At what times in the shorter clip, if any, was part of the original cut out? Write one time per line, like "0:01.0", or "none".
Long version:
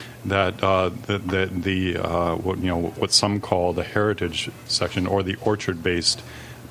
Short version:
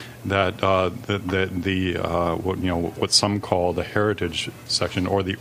none